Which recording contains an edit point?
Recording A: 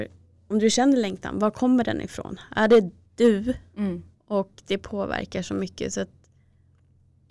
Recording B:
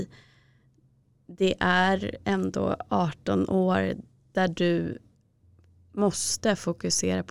A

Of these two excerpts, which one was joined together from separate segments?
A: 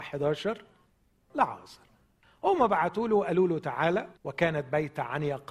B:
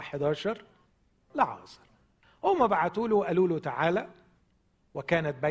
A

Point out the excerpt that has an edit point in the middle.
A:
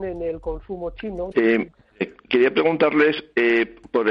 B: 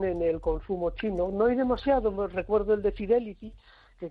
A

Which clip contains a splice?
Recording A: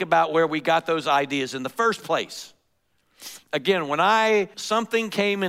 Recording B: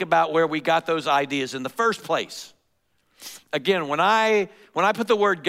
A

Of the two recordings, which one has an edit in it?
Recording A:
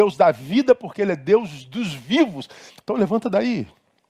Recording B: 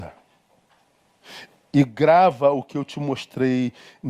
A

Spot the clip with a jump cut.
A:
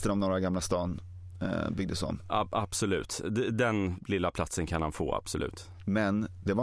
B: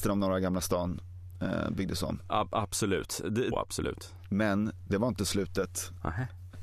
B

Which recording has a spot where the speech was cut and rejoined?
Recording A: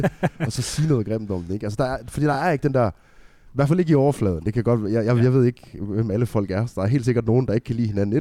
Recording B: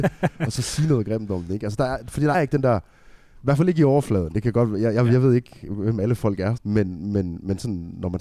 B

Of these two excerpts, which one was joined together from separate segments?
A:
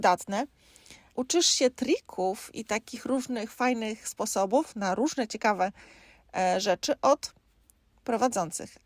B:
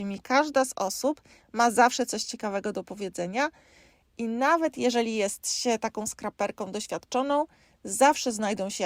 A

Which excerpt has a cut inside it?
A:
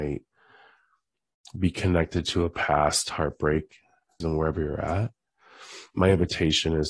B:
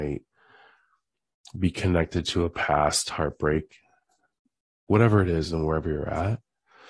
A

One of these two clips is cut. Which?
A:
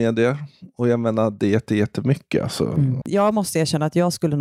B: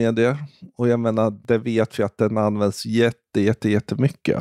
A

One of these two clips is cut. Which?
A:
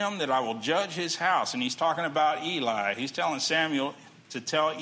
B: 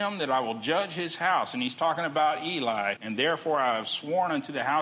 B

